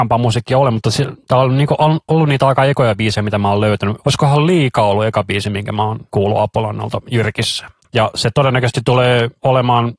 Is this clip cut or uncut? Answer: cut